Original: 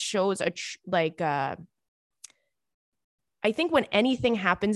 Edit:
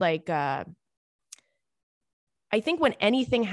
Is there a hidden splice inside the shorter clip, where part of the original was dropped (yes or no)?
no